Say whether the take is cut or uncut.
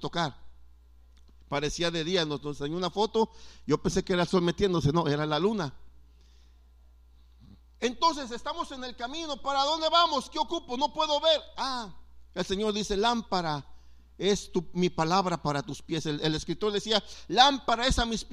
uncut